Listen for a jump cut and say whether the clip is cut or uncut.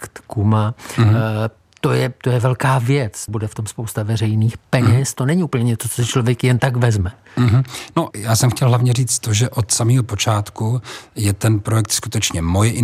cut